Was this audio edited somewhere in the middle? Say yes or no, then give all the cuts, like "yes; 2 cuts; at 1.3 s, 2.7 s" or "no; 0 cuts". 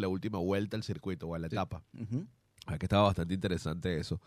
no; 0 cuts